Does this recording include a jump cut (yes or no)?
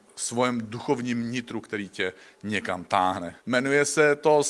yes